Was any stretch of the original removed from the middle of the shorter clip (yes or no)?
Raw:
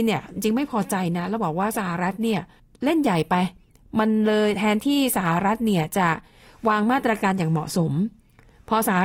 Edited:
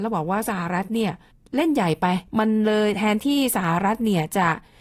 yes